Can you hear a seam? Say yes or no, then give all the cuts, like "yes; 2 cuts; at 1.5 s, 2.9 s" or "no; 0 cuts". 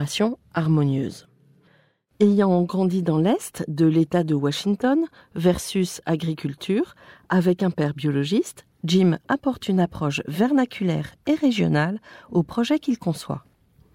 no; 0 cuts